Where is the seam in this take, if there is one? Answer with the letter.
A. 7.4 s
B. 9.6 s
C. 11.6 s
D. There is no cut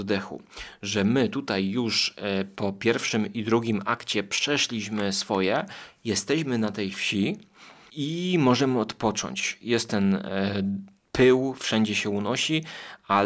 D